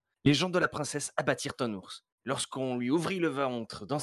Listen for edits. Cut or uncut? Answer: cut